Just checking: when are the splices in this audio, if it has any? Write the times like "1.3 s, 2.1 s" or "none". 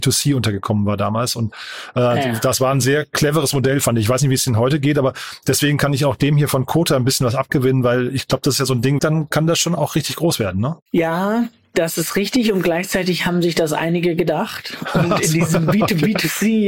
9.0 s